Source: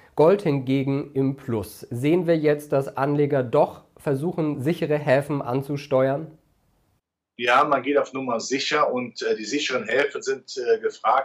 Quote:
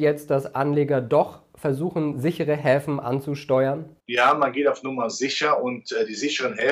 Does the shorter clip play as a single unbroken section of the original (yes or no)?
no